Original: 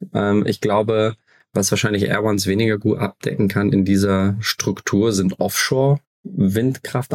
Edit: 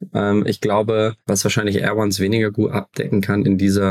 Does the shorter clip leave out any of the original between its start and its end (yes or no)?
yes